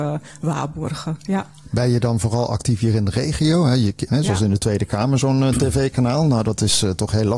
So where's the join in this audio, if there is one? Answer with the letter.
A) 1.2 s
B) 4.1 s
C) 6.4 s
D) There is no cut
B